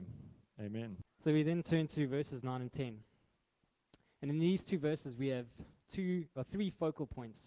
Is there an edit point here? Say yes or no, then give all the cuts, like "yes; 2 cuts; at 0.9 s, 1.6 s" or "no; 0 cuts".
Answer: yes; 1 cut; at 1.0 s